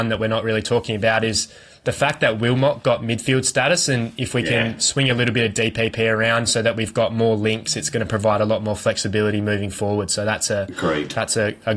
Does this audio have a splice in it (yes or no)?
no